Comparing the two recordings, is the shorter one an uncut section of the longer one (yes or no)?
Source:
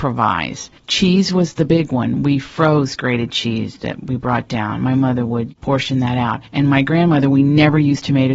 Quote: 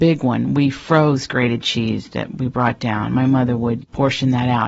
yes